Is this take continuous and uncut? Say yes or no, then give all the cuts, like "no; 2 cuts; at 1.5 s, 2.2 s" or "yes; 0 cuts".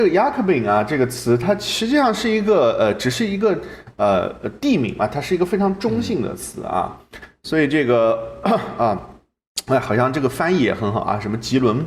yes; 0 cuts